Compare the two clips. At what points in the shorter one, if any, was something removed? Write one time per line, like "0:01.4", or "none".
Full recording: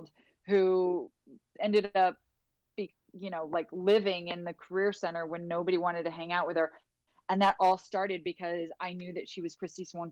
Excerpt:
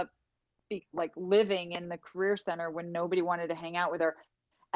0:00.9